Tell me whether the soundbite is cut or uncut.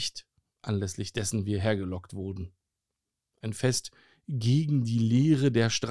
uncut